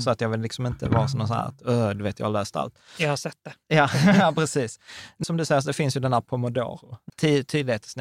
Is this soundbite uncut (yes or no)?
no